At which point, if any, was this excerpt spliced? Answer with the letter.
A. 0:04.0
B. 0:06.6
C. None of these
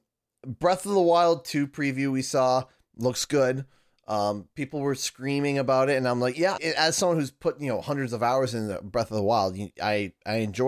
B